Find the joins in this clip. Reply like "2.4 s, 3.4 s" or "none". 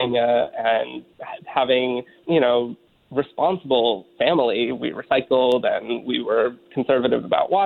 2.2 s